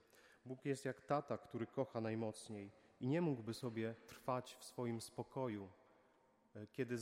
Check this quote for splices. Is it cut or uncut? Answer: uncut